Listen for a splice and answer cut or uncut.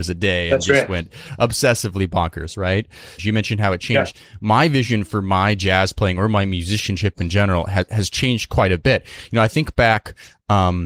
cut